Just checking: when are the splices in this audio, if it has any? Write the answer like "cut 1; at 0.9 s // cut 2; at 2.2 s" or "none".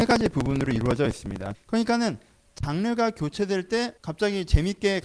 cut 1; at 1.5 s // cut 2; at 4.0 s